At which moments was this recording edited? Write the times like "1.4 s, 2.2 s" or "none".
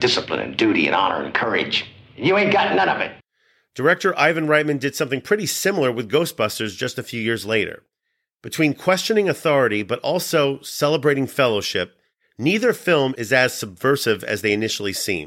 none